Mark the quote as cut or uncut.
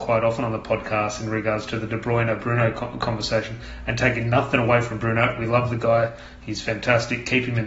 uncut